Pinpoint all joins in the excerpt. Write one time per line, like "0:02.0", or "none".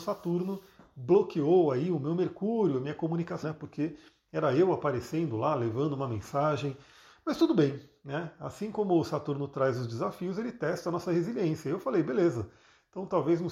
0:03.4